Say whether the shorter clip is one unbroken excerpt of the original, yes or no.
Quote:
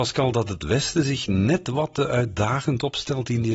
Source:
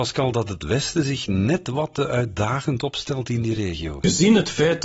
yes